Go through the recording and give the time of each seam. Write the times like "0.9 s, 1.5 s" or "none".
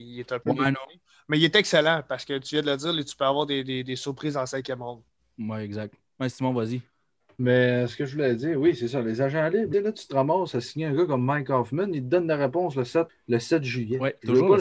9.7 s, 13.1 s